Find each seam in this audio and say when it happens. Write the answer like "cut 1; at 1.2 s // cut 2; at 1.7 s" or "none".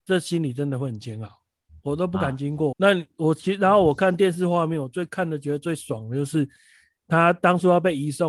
cut 1; at 1.7 s // cut 2; at 2.7 s